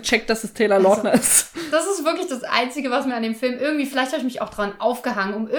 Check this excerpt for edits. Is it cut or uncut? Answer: uncut